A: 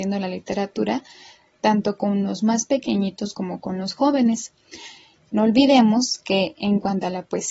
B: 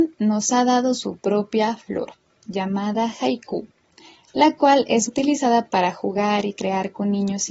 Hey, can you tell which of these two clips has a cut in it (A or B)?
B